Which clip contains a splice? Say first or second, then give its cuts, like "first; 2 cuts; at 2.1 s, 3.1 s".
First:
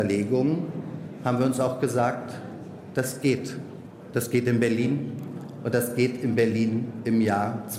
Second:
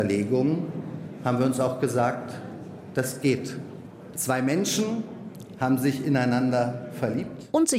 second; 1 cut; at 4.1 s